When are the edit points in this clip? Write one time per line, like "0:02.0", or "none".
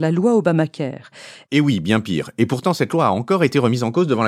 0:01.4